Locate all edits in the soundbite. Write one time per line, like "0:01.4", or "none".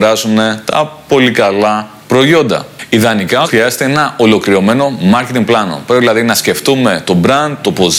0:03.4